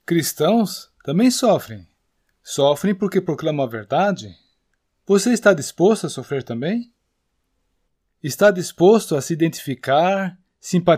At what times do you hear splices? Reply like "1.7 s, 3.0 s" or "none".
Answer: 4.9 s

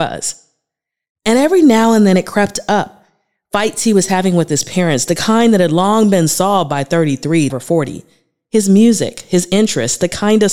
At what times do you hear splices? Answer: 7.5 s

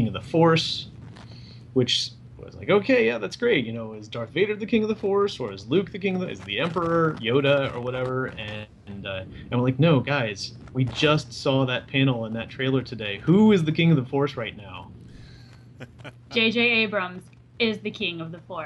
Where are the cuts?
none

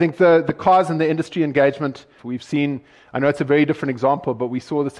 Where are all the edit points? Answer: 2.2 s

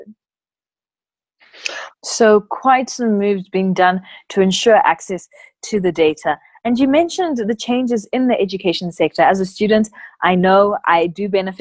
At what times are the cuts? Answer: 2.0 s

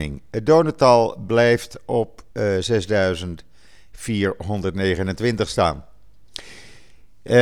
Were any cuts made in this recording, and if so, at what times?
2.3 s

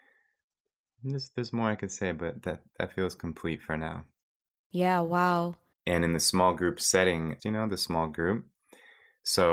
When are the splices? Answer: 5.7 s, 7.4 s

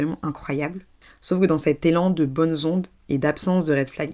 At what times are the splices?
none

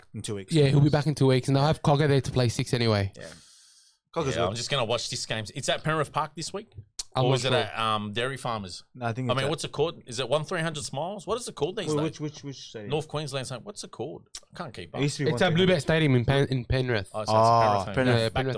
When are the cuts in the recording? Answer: none

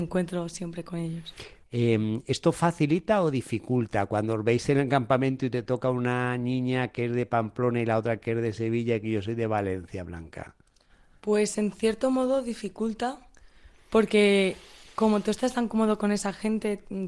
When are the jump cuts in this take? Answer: 1.6 s

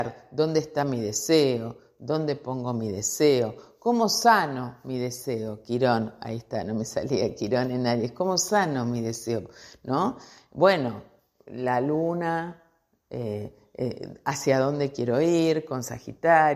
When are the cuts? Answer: none

